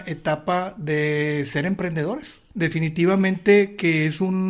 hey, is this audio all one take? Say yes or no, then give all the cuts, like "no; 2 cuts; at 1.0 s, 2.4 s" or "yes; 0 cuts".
no; 1 cut; at 2.5 s